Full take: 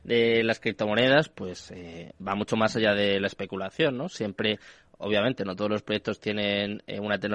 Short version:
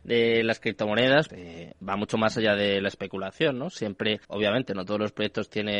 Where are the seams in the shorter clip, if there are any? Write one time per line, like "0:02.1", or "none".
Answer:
0:01.3
0:04.2

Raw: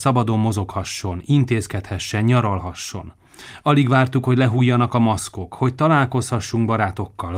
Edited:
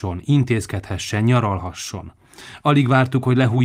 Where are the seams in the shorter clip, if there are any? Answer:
none

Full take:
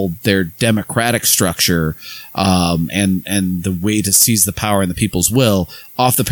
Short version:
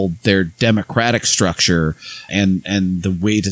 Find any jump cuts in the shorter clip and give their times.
0:02.3

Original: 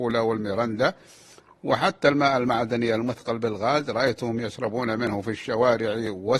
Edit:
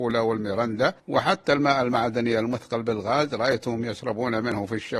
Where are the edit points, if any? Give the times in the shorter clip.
0:01.0

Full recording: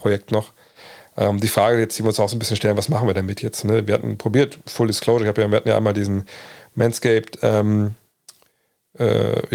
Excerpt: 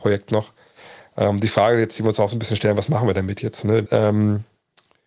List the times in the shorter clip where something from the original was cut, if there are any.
0:03.9

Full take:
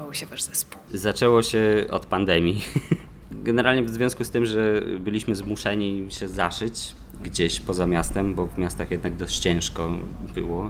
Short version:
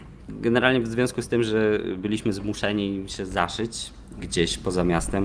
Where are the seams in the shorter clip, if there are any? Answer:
none

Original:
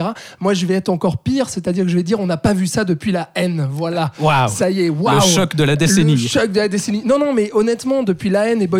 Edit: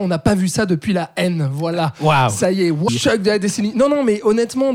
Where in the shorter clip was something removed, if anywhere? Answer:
0:02.9

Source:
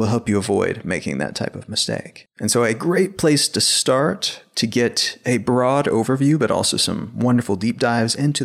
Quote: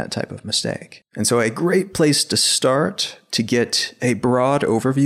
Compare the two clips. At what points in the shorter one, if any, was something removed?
none

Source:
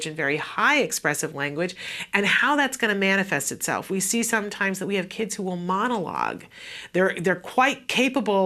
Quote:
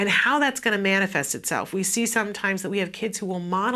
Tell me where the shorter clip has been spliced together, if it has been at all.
none

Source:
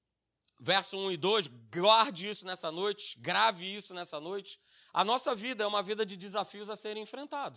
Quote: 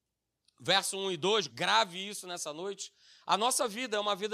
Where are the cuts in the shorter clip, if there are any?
0:01.5

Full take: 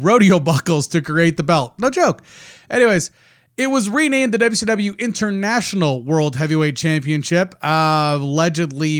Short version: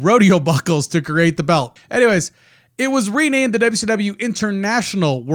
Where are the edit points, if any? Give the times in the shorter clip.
0:01.8

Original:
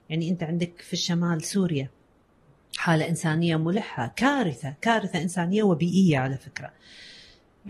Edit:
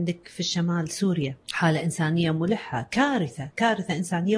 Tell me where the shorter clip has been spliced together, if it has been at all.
0:01.4

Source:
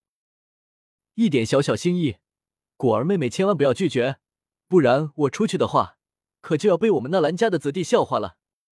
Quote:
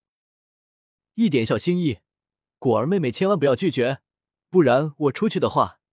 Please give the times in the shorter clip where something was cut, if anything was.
0:01.5

